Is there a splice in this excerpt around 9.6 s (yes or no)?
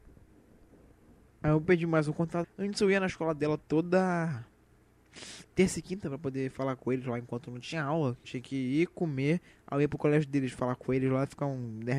no